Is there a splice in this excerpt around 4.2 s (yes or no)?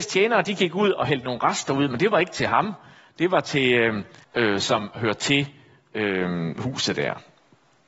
yes